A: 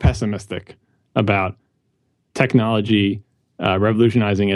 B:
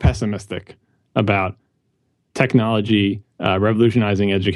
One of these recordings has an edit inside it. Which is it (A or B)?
B